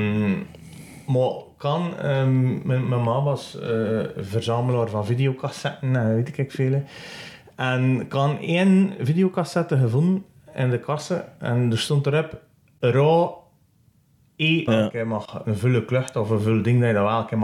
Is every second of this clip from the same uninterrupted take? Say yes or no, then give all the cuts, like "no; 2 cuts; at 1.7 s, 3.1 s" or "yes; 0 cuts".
no; 1 cut; at 14.7 s